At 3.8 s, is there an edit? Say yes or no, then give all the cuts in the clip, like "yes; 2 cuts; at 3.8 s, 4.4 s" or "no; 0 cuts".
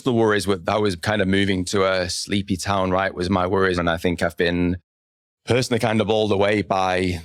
yes; 1 cut; at 3.8 s